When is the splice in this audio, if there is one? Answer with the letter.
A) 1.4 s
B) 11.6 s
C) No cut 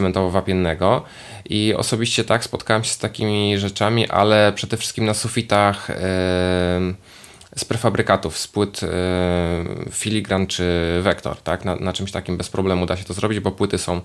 C